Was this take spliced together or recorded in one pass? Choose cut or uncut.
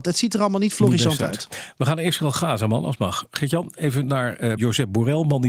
cut